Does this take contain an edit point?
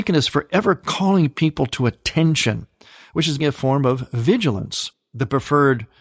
yes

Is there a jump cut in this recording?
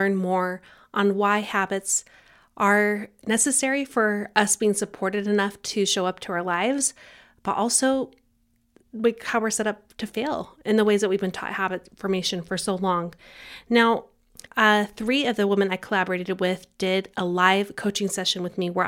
yes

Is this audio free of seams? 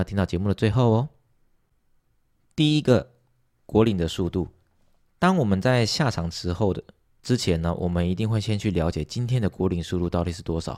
yes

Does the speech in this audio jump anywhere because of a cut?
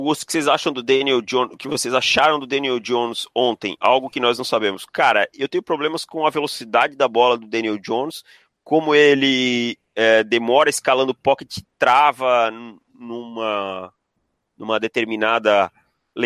no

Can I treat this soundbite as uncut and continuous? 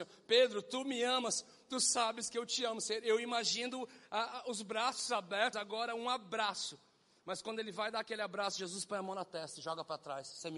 no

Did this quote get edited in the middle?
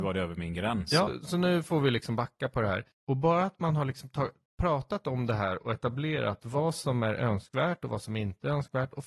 yes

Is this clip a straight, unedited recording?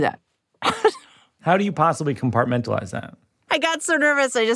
no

